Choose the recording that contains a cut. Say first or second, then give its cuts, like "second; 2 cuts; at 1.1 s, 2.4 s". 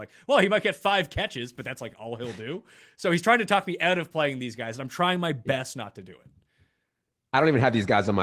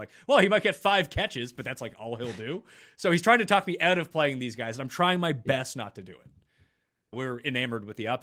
second; 1 cut; at 7.1 s